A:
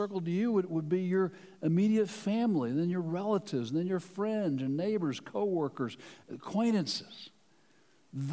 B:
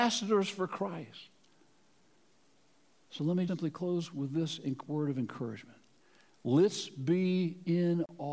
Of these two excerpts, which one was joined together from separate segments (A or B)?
B